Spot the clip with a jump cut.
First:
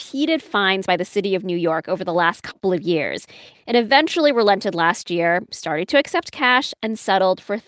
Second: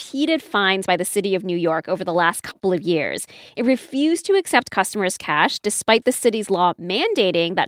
first; 1 cut; at 3.5 s

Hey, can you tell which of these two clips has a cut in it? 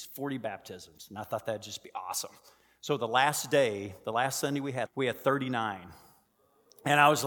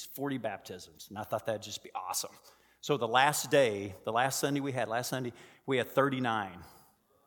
first; 1 cut; at 4.9 s

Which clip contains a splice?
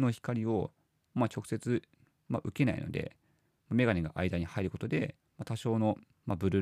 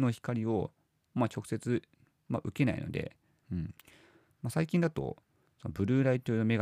second; 1 cut; at 3.4 s

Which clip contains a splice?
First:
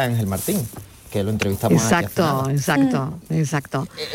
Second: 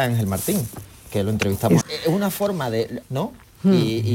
second; 2 cuts; at 1.8 s, 3.0 s

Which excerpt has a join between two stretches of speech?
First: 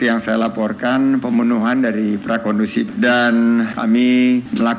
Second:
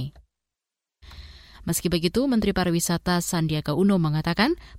second; 1 cut; at 1.5 s

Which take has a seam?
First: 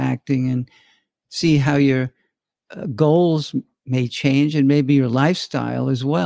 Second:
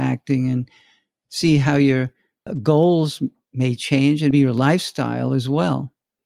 second; 2 cuts; at 2.5 s, 4.3 s

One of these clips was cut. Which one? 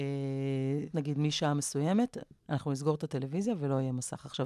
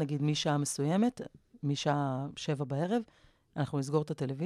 first; 2 cuts; at 0.9 s, 2.4 s

